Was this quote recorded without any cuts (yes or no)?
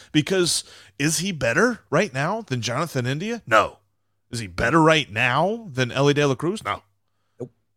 yes